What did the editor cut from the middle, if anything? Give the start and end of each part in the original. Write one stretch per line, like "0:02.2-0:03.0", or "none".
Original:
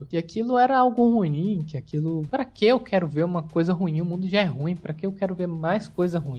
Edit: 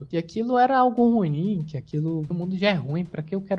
0:02.3-0:04.0